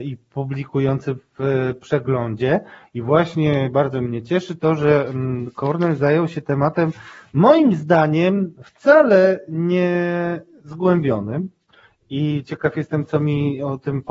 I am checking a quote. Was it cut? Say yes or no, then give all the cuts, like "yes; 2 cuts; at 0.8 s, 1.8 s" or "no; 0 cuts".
no; 0 cuts